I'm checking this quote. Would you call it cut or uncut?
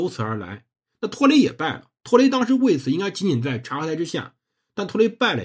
uncut